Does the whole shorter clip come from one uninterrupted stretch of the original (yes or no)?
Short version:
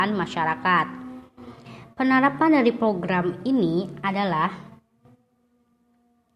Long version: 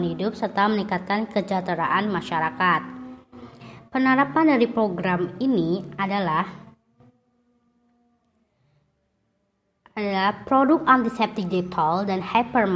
yes